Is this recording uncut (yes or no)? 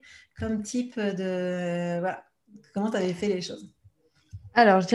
yes